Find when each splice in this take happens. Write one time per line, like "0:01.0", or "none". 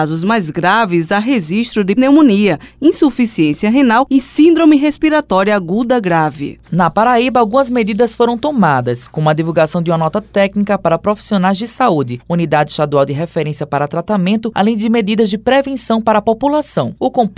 0:02.0
0:06.6
0:12.2